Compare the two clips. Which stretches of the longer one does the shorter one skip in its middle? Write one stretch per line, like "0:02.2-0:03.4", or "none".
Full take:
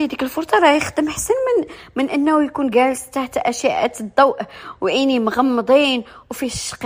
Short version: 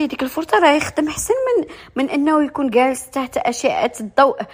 none

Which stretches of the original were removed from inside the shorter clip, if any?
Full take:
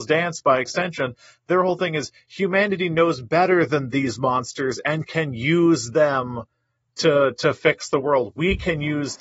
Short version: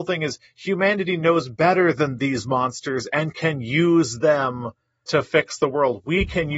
0:06.8-0:07.4

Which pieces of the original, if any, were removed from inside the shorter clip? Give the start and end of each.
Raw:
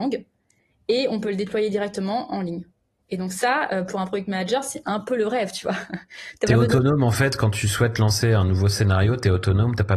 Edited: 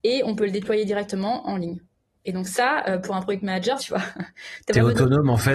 0:04.6-0:05.5

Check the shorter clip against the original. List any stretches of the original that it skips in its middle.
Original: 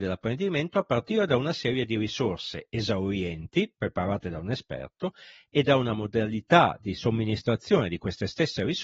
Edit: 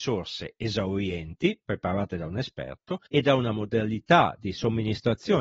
0:05.2-0:05.5

